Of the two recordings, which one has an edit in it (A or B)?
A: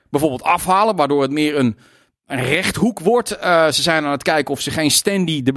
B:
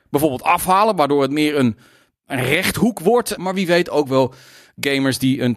B